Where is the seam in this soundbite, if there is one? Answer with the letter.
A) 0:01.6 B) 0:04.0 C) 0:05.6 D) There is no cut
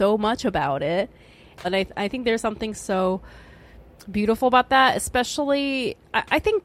A